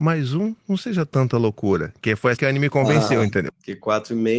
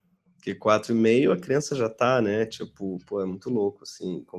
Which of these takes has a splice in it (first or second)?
first